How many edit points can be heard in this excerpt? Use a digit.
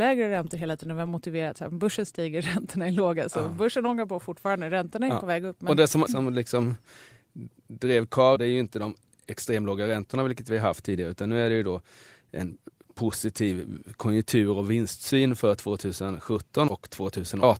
3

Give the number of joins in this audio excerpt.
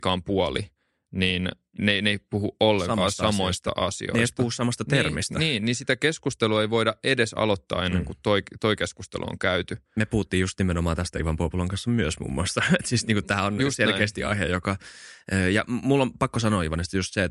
0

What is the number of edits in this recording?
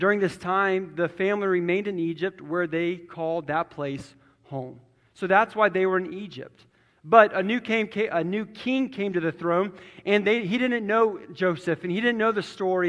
0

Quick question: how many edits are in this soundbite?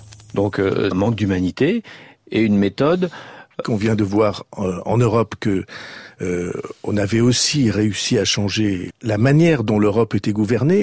3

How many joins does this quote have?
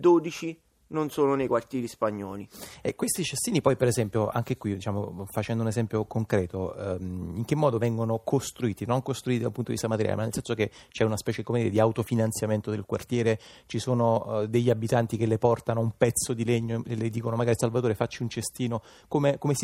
0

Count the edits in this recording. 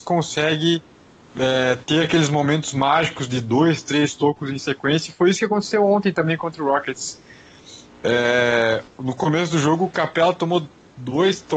0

